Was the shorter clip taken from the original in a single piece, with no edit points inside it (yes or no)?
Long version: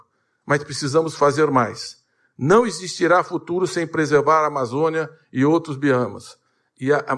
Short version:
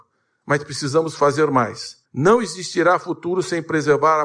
no